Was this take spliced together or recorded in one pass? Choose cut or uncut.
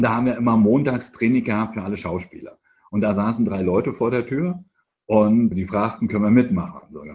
cut